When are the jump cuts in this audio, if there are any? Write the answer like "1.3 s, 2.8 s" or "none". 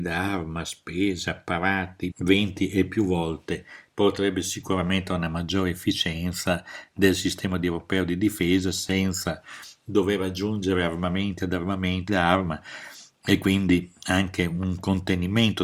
2.1 s, 12.1 s